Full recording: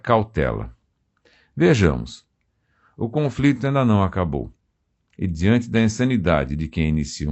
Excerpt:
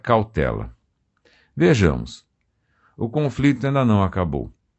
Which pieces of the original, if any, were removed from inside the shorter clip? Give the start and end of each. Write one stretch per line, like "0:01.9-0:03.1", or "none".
none